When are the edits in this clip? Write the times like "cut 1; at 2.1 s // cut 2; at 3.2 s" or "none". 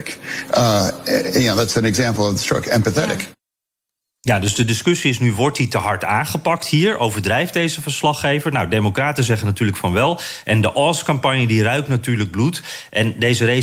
none